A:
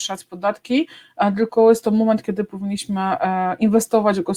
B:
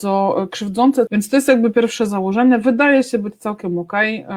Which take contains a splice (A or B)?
B